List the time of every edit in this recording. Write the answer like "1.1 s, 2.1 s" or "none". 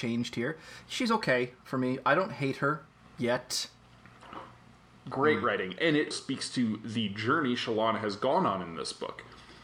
5.0 s, 6.1 s